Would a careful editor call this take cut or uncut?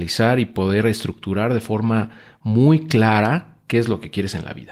uncut